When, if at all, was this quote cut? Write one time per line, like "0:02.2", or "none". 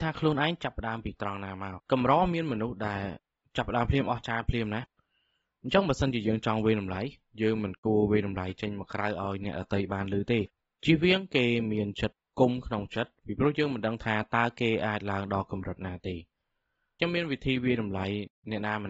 0:01.8